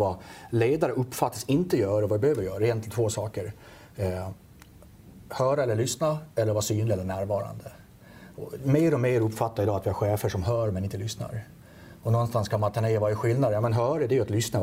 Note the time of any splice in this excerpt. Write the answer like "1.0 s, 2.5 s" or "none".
none